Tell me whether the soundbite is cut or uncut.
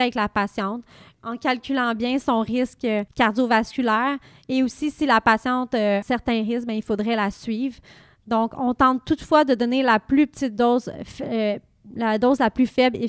cut